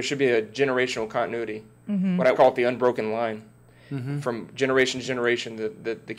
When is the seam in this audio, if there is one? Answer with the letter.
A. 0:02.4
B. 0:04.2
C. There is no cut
A